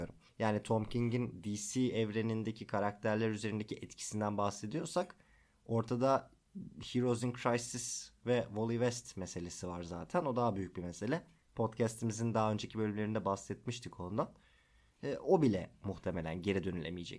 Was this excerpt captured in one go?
yes; 0 cuts

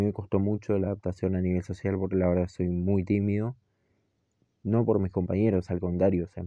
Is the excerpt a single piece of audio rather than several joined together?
yes; 0 cuts

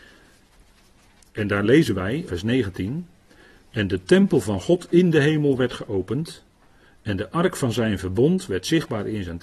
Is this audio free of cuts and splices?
no; 1 cut; at 2.3 s

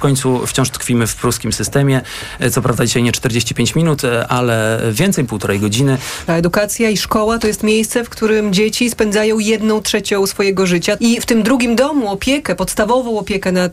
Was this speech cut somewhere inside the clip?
yes; 3 cuts; at 5.3 s, 6.3 s, 11.0 s

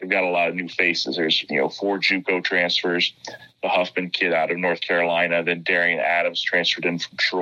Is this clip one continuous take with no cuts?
yes; 0 cuts

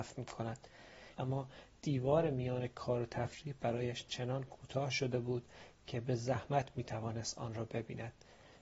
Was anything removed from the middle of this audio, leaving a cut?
yes; 1 cut; at 1.1 s

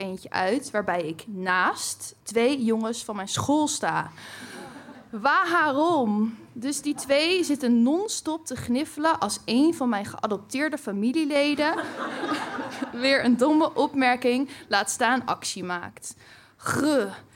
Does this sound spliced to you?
yes; 1 cut; at 2.2 s

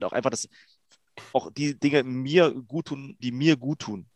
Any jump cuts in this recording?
yes; 2 cuts; at 1.3 s, 3.2 s

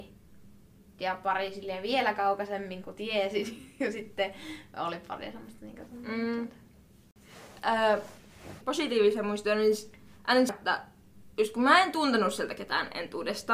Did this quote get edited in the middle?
yes; 2 cuts; at 8.6 s, 10.5 s

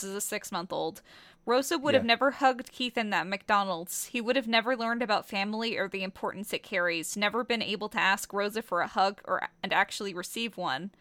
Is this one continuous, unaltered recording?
yes; 0 cuts

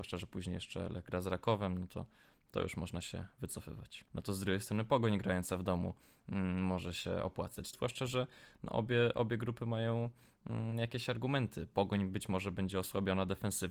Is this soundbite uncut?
no; 2 cuts; at 4.1 s, 7.7 s

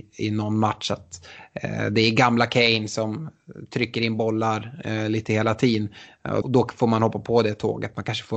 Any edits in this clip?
yes; 1 cut; at 6.4 s

